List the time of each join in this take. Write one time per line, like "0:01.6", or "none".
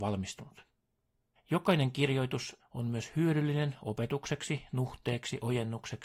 0:01.3
0:02.6